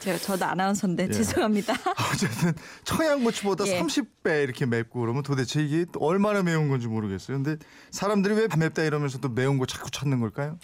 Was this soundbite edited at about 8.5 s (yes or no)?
yes